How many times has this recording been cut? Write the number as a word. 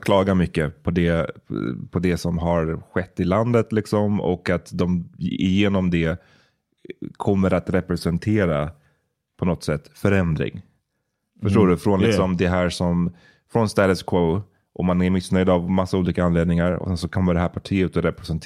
zero